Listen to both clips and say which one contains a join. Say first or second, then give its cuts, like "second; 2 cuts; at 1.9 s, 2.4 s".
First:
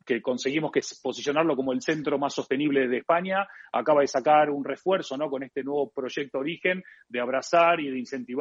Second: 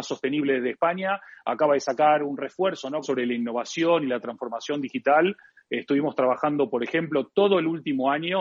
second; 1 cut; at 3.0 s